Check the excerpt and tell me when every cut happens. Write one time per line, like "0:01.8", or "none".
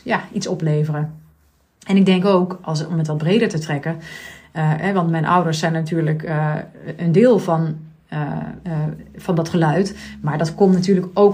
none